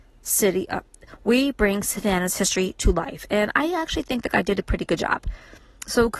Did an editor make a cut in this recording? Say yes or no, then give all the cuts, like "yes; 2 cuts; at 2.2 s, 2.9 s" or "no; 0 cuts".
no; 0 cuts